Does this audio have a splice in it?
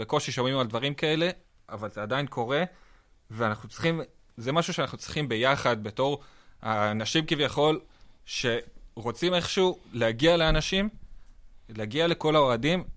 no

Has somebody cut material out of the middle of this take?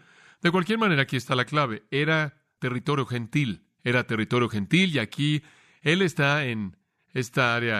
no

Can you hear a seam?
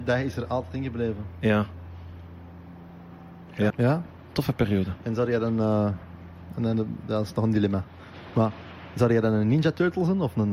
yes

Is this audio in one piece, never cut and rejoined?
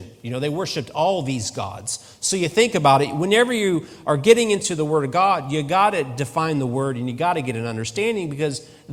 yes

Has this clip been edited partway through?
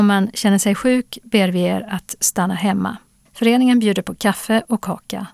yes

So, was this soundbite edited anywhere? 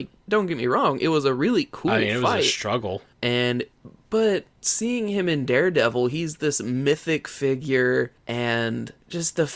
no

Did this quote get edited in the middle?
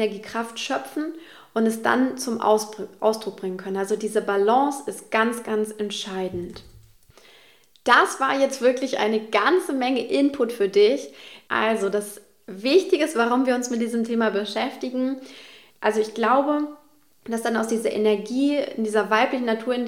yes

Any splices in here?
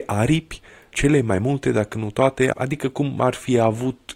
yes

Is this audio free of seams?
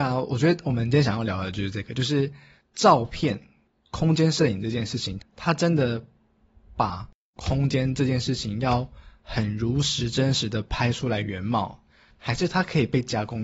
no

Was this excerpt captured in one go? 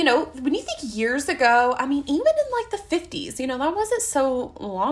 yes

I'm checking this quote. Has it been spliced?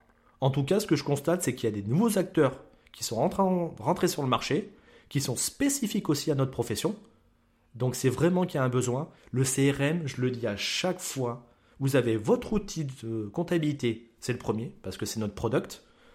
yes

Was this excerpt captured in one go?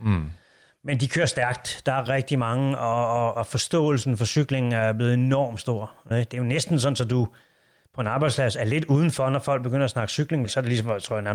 no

